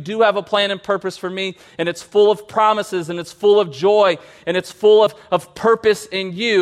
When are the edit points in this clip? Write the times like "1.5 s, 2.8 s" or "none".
none